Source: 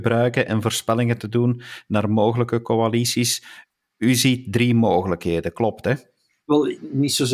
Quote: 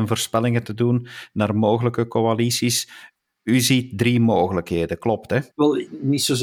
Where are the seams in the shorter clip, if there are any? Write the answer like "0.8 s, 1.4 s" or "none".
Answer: 5.5 s